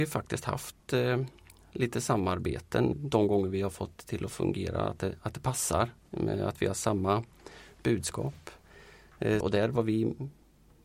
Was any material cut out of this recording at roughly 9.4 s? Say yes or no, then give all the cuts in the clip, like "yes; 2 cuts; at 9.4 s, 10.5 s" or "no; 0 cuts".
yes; 2 cuts; at 2.9 s, 9.4 s